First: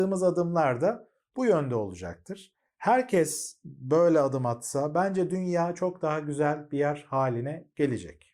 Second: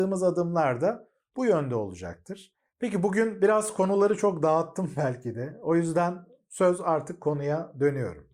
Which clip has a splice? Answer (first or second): second